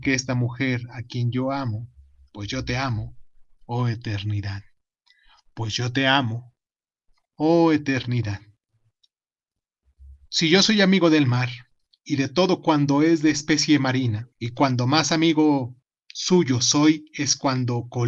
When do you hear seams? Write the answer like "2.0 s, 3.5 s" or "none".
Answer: 10.3 s, 14.3 s